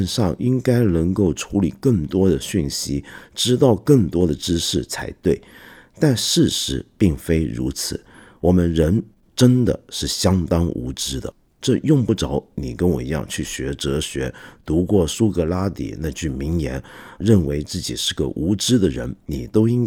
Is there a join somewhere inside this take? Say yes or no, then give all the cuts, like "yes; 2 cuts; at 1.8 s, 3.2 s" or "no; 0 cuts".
no; 0 cuts